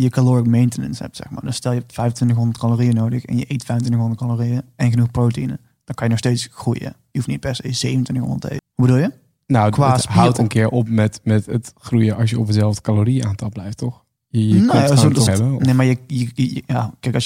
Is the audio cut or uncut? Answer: cut